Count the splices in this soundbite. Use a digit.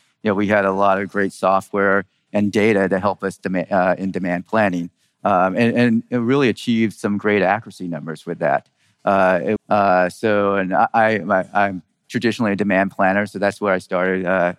1